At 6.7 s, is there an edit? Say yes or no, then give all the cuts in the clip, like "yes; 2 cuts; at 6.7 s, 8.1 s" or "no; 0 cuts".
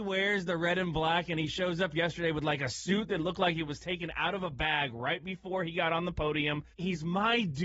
yes; 1 cut; at 6.7 s